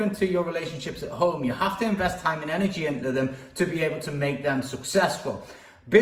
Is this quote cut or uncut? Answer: uncut